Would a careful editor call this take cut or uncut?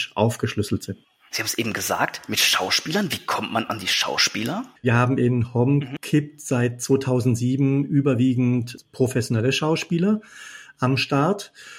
cut